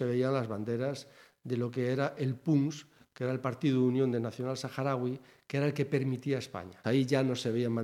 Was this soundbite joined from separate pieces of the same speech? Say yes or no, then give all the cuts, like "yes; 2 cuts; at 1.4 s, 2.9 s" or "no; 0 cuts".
yes; 1 cut; at 6.8 s